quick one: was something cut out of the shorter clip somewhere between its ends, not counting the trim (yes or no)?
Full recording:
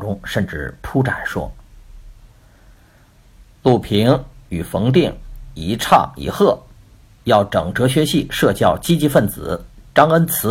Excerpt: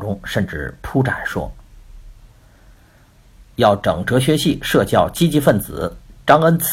yes